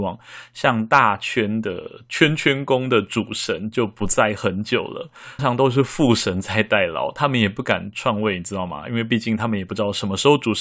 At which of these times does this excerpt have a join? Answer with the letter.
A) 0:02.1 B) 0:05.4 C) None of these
B